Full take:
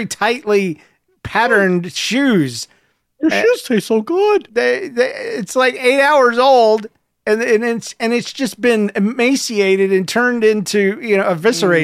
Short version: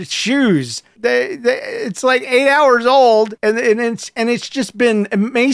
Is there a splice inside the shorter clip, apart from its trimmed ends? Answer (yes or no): yes